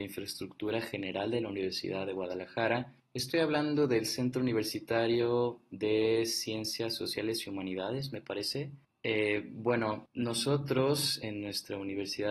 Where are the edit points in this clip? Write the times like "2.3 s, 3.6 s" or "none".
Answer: none